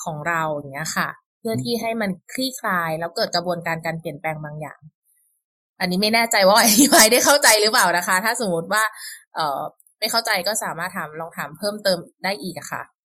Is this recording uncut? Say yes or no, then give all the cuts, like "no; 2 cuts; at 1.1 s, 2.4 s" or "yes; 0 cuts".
yes; 0 cuts